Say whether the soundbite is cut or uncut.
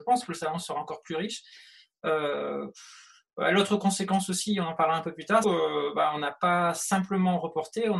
cut